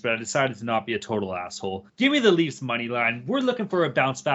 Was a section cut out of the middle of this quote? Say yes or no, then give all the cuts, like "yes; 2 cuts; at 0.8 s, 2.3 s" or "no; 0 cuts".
yes; 1 cut; at 1.9 s